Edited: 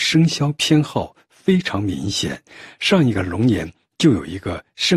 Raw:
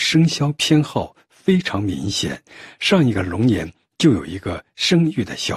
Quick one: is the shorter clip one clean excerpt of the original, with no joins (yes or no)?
yes